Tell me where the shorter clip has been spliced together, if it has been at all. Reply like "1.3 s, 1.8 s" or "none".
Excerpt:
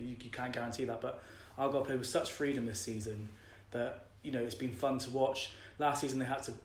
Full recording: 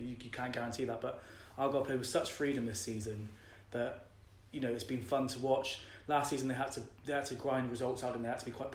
4.2 s